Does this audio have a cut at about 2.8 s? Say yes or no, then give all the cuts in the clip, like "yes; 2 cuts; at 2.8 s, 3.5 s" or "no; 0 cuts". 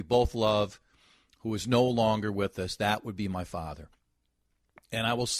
no; 0 cuts